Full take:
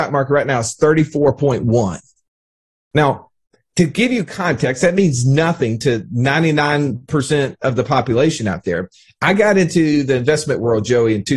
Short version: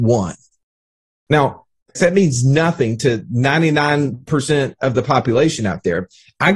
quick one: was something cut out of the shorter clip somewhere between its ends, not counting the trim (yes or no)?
yes